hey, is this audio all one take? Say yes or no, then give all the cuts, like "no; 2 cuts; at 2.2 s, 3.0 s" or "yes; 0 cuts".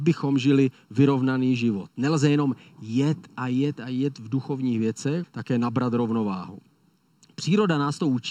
no; 1 cut; at 5.2 s